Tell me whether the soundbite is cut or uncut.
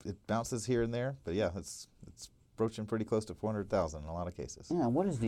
uncut